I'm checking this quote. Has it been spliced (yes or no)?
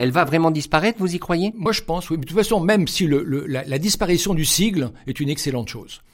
no